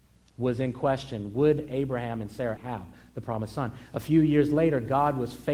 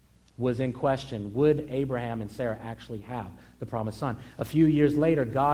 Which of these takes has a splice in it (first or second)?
first